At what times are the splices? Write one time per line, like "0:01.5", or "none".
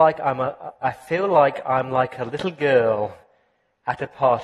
none